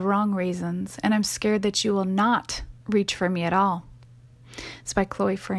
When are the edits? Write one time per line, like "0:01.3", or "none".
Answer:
none